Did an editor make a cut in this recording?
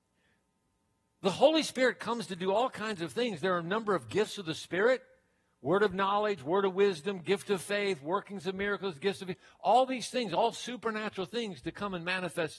no; 0 cuts

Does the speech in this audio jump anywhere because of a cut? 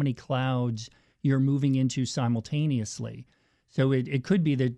no; 0 cuts

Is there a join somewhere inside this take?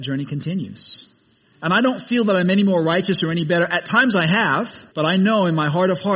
yes; 1 cut; at 4.9 s

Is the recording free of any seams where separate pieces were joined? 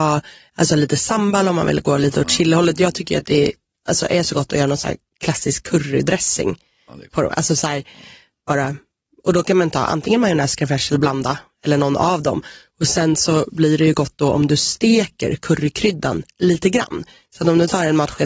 yes; 0 cuts

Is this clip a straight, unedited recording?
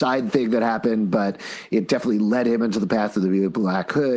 yes; 0 cuts

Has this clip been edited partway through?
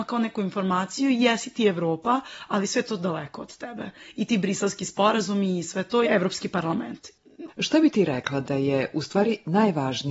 yes; 2 cuts; at 6.0 s, 7.5 s

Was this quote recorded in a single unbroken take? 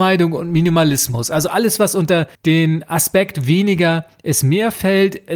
no; 1 cut; at 2.3 s

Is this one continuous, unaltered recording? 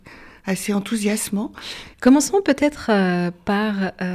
no; 1 cut; at 1.9 s

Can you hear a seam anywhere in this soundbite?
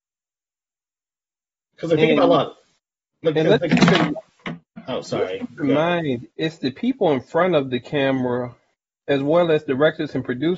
no; 0 cuts

